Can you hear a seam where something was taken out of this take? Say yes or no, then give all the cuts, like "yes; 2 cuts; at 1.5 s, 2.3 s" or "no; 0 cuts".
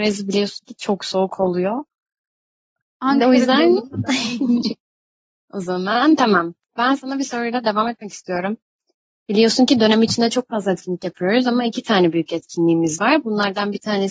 yes; 1 cut; at 4.8 s